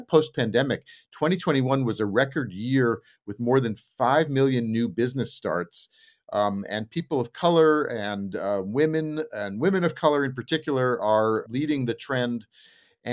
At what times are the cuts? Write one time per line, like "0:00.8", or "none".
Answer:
none